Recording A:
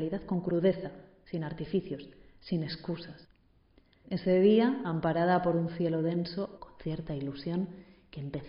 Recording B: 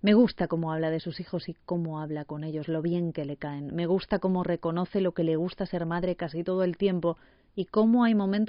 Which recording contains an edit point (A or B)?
A